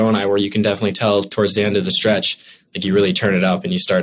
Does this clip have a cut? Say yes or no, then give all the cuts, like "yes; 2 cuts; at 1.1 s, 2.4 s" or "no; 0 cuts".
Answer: no; 0 cuts